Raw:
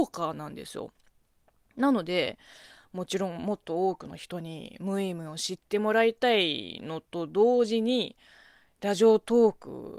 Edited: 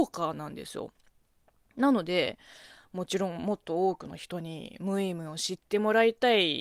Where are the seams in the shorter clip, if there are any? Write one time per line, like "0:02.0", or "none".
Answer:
none